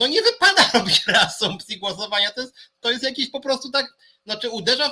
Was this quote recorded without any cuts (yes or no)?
yes